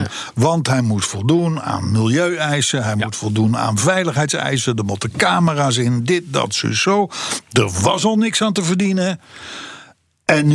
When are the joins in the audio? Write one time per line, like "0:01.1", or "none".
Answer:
none